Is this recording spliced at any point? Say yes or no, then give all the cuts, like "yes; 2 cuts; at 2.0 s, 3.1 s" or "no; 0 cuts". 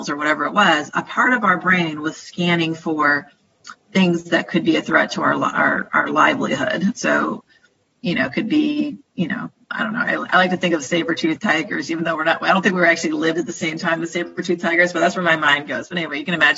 no; 0 cuts